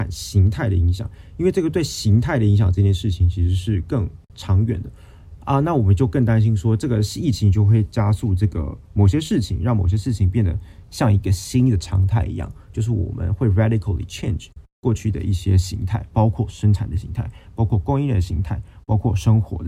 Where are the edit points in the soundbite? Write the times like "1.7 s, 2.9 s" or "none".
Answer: none

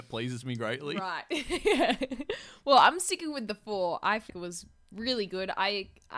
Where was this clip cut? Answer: 4.3 s

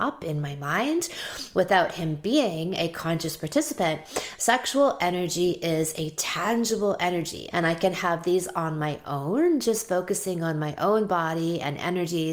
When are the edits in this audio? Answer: 4.4 s, 7.5 s

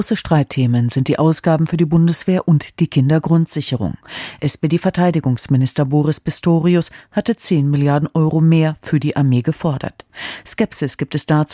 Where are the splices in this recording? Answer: none

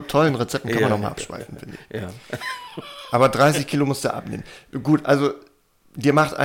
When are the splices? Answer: none

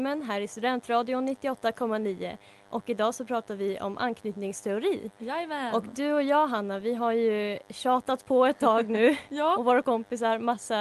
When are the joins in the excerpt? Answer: none

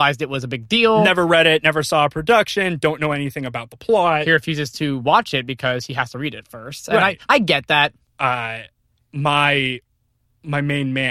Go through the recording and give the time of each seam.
none

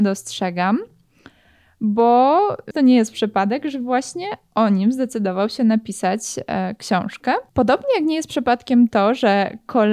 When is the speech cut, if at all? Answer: 2.7 s, 7.5 s

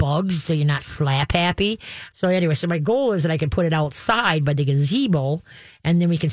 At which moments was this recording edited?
2.1 s

